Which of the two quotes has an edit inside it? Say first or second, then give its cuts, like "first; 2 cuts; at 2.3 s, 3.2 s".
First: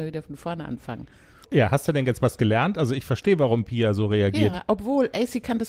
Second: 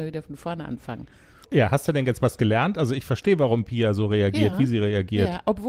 first; 1 cut; at 4.5 s